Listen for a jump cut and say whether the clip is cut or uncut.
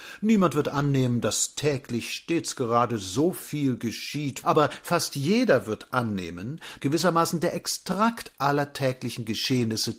cut